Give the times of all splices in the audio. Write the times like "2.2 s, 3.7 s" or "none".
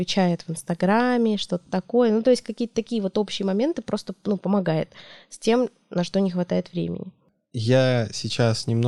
none